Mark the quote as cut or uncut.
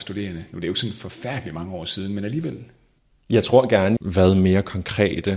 cut